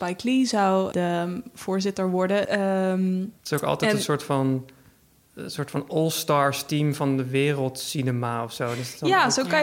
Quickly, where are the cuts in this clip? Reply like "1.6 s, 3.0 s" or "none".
0.9 s, 2.4 s

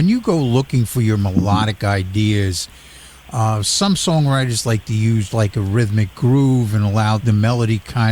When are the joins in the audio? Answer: 5.3 s, 7.2 s

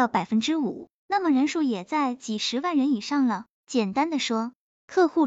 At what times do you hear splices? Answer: 3.6 s

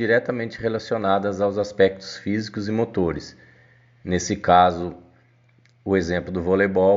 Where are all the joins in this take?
none

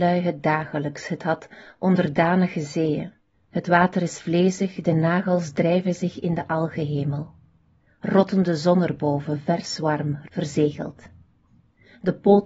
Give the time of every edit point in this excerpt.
3.3 s, 10.3 s

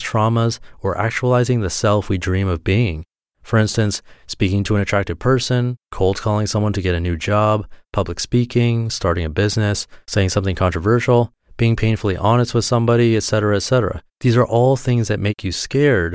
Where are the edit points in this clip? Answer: 14.1 s

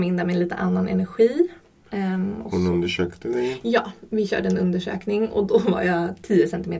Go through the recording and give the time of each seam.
none

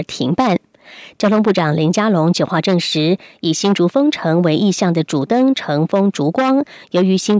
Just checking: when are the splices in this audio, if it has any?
none

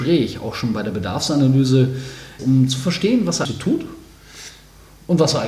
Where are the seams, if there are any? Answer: 2.4 s, 3.5 s

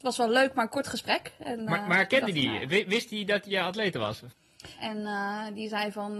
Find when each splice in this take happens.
4.8 s

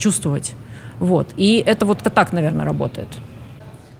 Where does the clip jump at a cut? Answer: 2.0 s

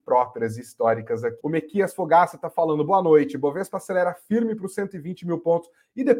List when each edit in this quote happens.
1.4 s

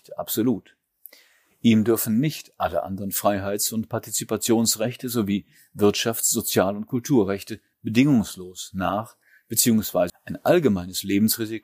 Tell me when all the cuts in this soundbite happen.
10.1 s

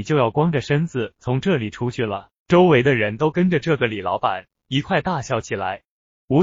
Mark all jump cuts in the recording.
2.4 s

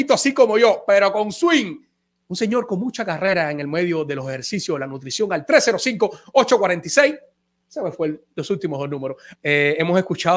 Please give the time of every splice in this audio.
2.2 s, 9.3 s

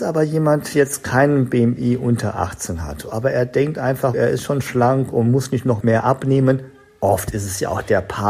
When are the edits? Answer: 4.1 s, 5.8 s

